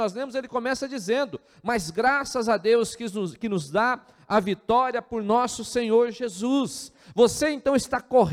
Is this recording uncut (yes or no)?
yes